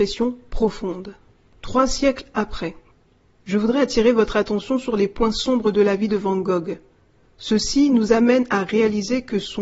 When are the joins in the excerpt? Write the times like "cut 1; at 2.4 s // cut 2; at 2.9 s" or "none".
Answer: none